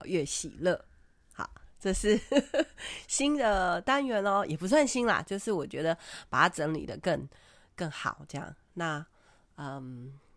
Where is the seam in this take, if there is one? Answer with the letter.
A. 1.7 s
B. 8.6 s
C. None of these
C